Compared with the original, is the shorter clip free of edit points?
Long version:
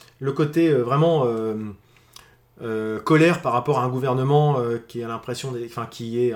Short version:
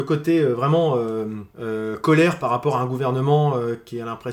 no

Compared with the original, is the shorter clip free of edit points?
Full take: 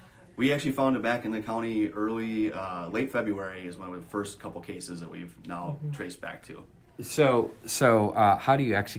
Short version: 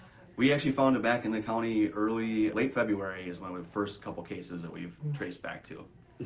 no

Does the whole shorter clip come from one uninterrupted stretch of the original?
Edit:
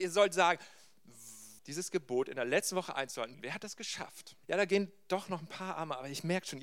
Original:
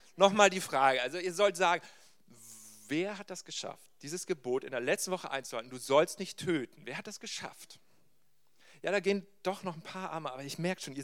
no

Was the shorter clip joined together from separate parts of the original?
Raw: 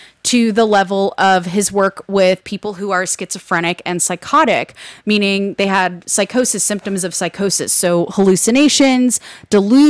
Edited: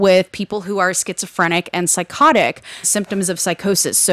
yes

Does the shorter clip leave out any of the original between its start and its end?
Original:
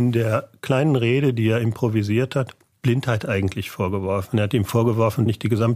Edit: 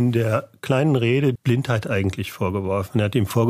yes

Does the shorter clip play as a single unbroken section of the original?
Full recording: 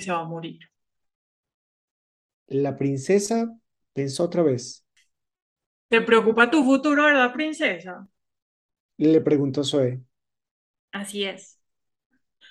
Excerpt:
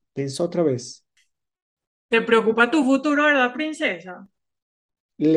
yes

